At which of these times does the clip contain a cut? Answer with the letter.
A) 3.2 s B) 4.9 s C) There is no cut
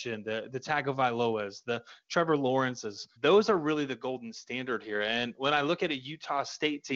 A